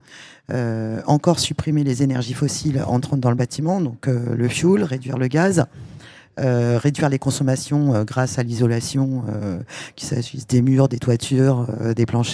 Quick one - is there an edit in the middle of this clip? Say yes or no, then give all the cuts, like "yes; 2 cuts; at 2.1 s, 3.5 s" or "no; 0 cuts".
no; 0 cuts